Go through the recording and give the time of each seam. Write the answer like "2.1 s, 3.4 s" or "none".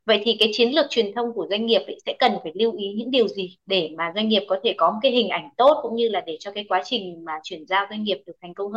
none